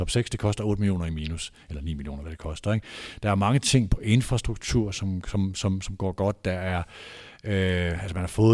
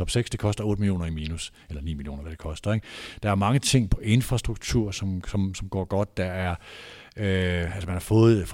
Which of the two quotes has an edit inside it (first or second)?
second